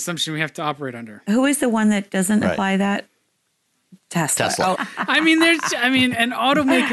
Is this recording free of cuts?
no; 1 cut; at 4.7 s

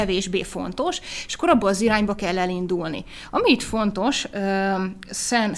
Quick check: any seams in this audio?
no; 0 cuts

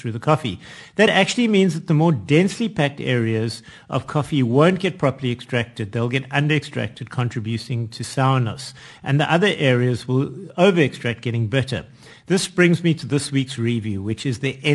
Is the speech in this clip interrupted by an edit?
no; 0 cuts

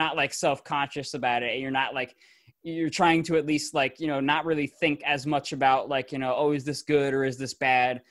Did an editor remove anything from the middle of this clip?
no; 0 cuts

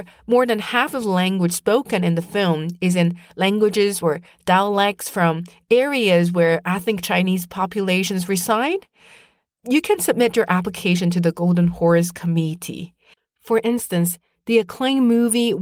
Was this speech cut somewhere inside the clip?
no; 0 cuts

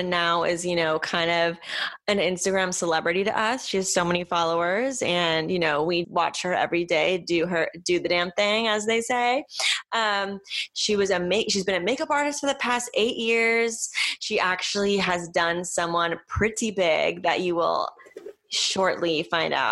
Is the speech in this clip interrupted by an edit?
yes; 1 cut; at 6.0 s

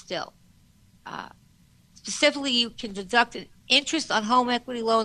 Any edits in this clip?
no; 0 cuts

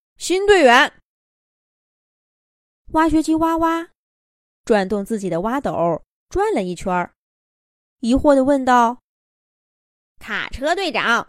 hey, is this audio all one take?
yes; 0 cuts

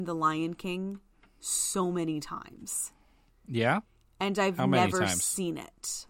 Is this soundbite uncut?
yes; 0 cuts

